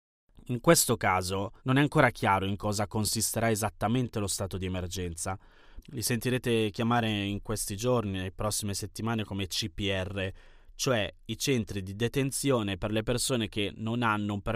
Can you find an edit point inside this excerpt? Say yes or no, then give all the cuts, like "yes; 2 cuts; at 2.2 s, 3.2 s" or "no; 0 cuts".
yes; 2 cuts; at 1.6 s, 5.8 s